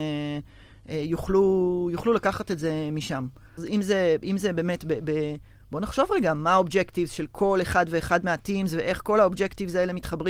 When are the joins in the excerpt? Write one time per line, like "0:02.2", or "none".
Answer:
0:03.6